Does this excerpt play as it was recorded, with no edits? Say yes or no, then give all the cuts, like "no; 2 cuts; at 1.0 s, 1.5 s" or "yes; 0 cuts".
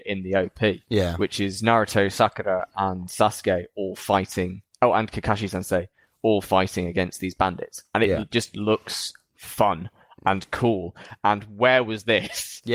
yes; 0 cuts